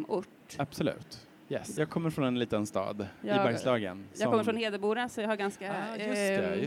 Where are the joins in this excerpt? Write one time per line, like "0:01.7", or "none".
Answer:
0:01.8